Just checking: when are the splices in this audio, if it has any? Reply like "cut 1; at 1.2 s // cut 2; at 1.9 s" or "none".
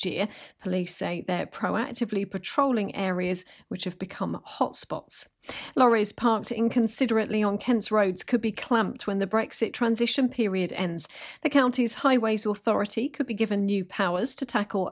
none